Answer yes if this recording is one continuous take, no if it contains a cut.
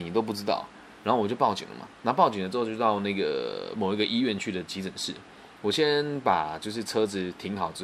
yes